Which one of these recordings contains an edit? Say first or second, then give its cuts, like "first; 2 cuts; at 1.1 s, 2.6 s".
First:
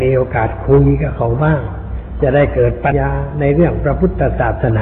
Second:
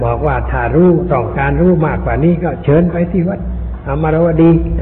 first; 1 cut; at 2.9 s